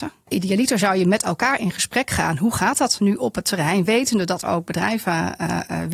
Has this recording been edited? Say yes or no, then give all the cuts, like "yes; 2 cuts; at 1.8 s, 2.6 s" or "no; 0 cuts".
yes; 1 cut; at 4.4 s